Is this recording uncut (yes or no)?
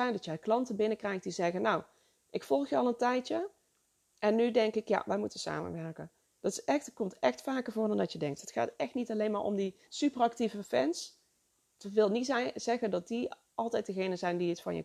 no